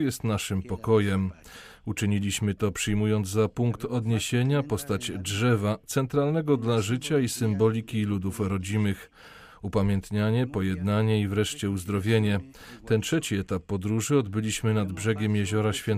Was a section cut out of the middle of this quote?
no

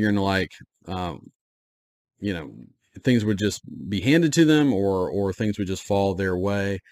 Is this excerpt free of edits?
yes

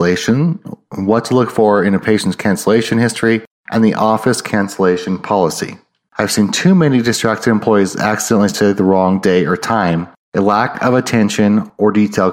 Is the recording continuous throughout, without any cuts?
no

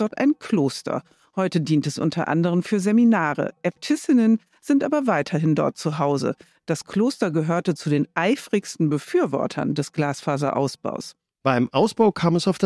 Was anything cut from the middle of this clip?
no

